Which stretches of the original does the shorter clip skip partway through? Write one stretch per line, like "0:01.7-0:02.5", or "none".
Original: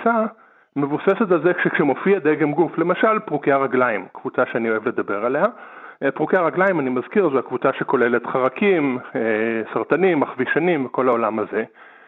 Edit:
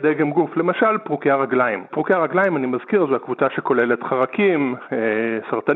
0:04.1-0:06.1